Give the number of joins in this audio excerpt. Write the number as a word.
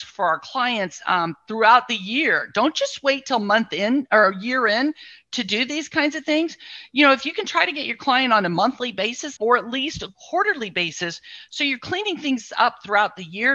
one